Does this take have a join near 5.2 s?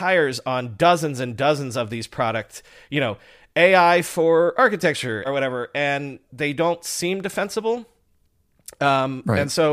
yes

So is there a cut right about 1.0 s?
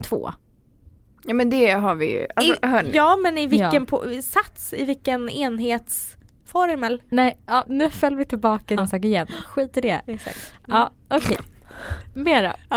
no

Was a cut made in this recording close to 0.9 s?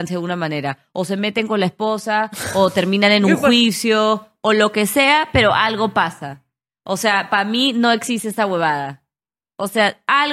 no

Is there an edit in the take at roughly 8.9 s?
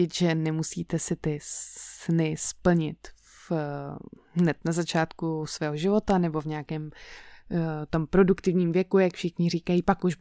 no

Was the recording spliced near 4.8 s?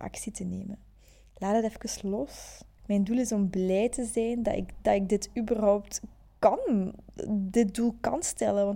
no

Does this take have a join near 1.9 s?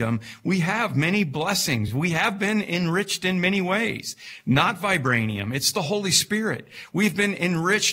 no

